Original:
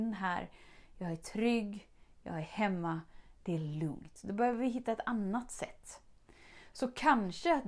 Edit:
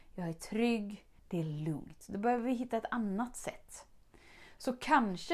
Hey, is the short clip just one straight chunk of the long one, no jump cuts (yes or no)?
no